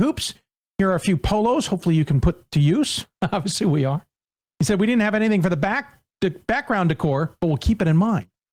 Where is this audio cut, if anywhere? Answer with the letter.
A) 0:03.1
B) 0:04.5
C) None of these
C